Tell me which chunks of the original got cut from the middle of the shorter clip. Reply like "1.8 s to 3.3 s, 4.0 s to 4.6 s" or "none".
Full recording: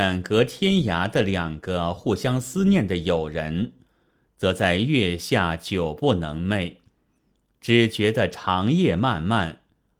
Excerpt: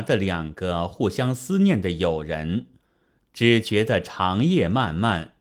4.2 s to 7.5 s